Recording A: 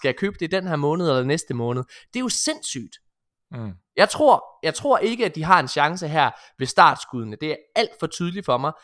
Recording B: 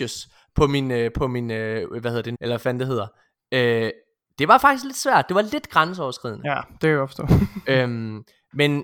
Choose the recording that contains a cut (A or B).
B